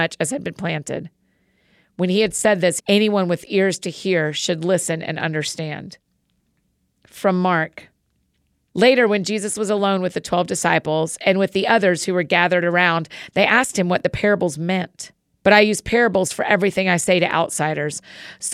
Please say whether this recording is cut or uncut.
cut